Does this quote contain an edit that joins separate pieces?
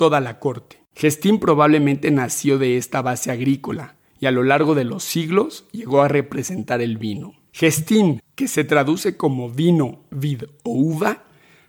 yes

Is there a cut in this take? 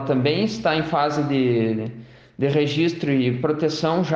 no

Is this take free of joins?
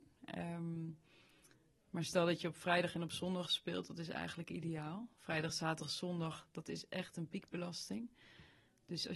yes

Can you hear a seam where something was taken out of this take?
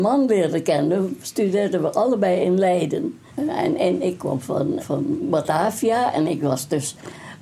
yes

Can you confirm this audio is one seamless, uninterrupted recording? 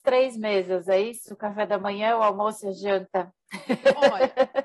yes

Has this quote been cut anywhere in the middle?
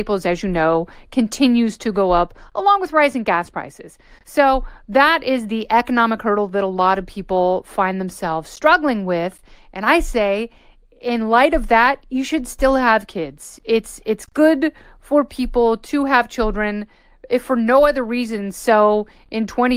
no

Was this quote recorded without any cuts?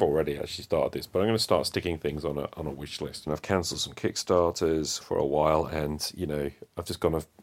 no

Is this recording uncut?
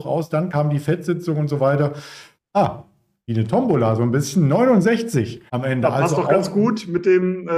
no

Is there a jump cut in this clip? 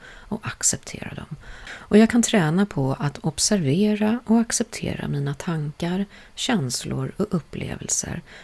yes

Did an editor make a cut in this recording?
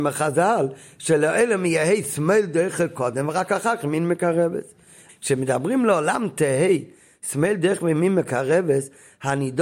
yes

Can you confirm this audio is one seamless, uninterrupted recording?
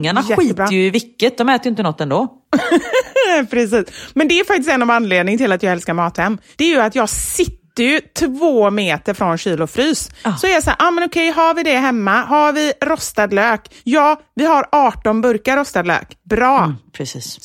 yes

